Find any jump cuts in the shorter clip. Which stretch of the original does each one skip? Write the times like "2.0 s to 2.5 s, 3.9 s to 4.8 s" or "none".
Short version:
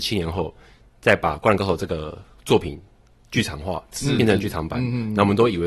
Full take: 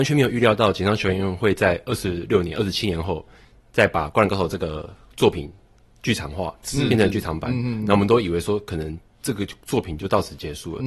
none